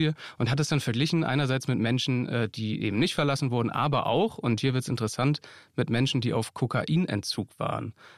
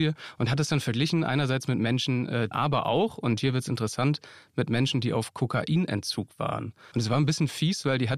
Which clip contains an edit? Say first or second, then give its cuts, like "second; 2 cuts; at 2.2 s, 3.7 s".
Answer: second; 2 cuts; at 2.5 s, 6.9 s